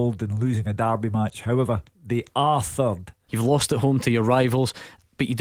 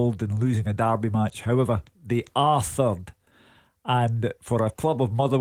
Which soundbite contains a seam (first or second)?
first